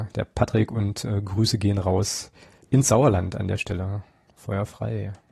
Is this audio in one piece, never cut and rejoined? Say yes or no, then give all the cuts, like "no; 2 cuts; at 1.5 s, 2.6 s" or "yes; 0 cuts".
yes; 0 cuts